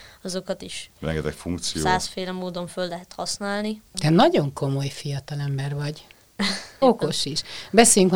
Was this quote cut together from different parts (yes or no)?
yes